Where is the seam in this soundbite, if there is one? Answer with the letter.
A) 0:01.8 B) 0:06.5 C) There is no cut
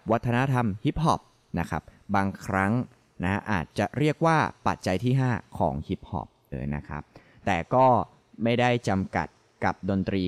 B